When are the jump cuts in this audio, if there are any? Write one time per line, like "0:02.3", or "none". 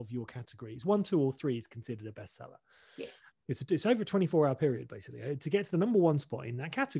0:03.3